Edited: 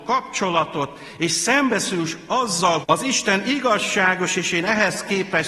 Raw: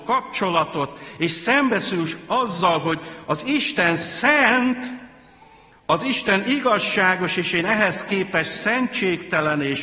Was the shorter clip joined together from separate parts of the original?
yes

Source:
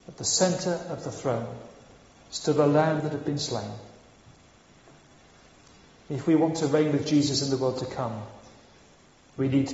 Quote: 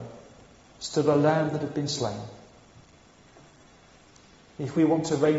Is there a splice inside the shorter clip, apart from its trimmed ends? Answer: no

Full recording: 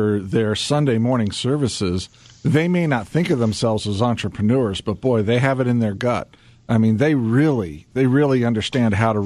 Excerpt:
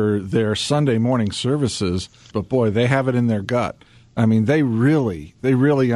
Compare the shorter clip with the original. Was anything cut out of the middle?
yes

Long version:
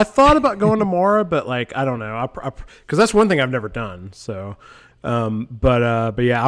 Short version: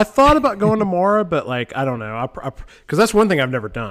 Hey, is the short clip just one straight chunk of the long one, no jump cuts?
yes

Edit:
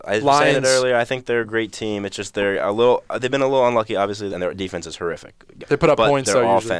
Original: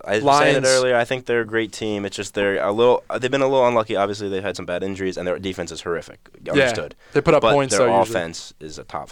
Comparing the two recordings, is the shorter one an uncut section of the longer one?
no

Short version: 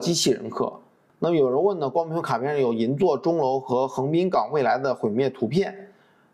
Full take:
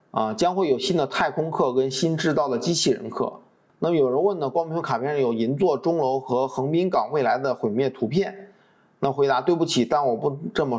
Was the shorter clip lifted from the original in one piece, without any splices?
yes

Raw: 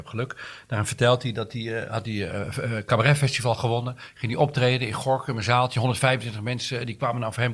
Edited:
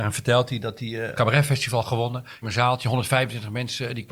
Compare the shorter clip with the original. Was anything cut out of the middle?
yes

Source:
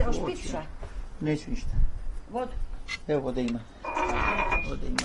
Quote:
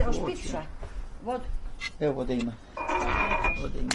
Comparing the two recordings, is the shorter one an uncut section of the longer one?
no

